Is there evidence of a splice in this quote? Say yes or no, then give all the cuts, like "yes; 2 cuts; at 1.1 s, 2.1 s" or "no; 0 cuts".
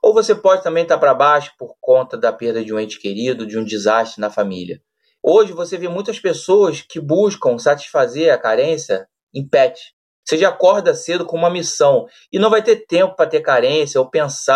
yes; 2 cuts; at 5.2 s, 10.2 s